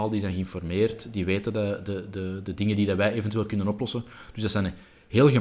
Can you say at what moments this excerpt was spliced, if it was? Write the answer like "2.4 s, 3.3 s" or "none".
none